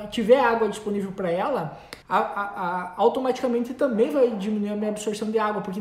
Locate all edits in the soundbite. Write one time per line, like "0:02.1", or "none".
0:02.0